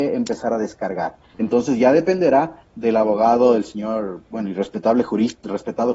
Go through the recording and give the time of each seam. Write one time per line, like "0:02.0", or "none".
0:01.3